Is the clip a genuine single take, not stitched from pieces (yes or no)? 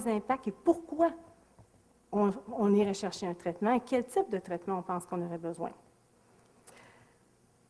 yes